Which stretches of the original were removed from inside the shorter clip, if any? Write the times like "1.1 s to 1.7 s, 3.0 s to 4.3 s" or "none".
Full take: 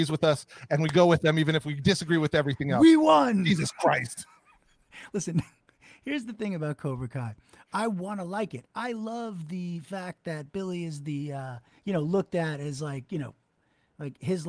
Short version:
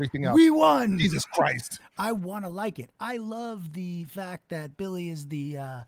4.3 s to 7.5 s